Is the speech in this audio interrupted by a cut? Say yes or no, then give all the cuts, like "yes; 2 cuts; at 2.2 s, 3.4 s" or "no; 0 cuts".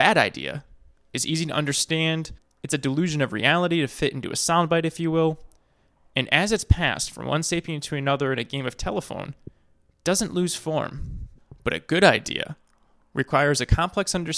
no; 0 cuts